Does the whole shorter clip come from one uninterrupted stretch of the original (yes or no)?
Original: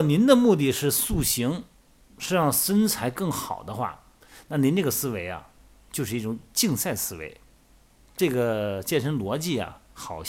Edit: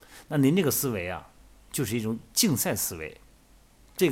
yes